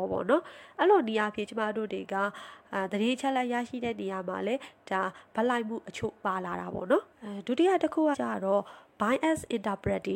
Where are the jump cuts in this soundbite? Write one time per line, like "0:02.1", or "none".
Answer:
0:07.1
0:08.1